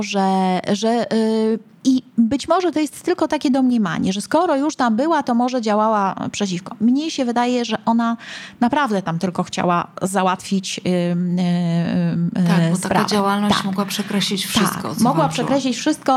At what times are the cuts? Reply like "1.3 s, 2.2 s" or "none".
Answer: none